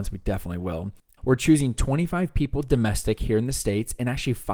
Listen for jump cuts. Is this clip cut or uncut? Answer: cut